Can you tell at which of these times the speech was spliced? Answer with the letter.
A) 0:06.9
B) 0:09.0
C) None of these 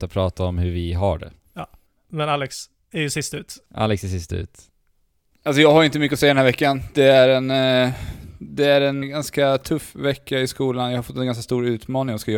B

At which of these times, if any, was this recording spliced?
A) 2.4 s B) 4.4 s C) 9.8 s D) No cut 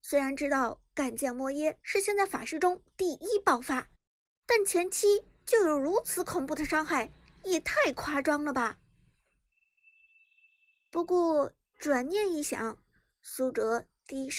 D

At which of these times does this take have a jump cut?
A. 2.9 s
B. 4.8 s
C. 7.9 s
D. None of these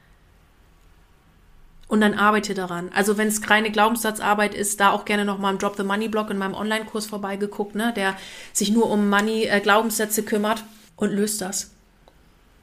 D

